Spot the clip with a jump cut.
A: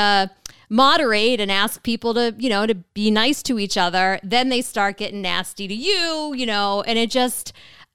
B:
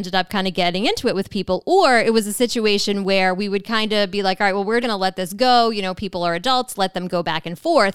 B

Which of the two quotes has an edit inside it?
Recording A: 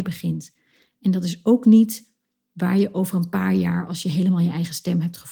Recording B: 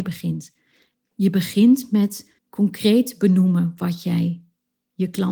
B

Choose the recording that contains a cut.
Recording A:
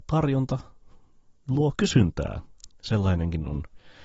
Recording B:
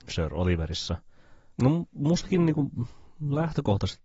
B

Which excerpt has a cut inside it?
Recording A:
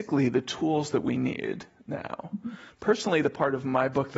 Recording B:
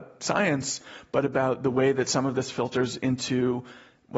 A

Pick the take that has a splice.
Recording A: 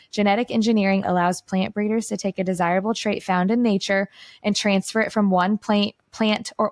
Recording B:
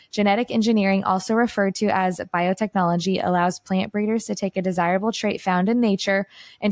A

